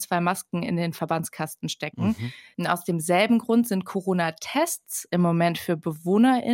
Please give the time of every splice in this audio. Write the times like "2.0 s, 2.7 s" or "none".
2.5 s

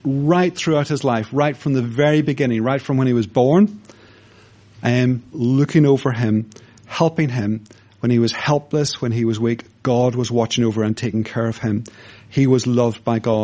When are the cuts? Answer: 5.3 s

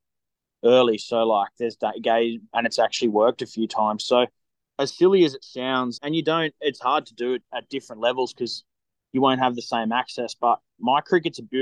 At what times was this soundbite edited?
2.5 s, 4.6 s, 6.0 s

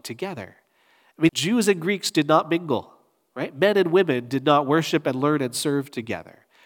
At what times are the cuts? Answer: 1.3 s

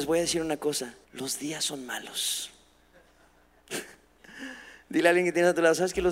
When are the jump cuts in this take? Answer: 1.0 s

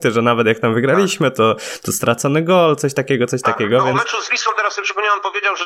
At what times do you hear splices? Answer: none

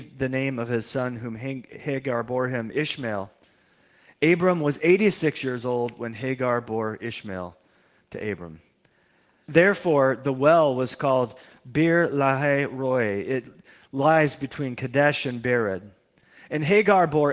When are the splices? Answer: 9.4 s

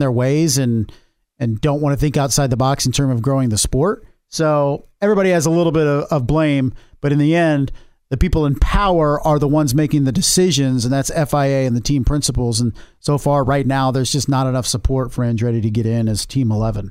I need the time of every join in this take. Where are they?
none

